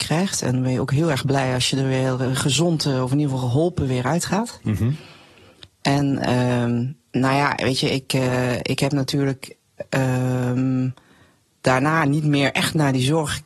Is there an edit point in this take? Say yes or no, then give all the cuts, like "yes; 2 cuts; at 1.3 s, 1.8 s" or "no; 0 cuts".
no; 0 cuts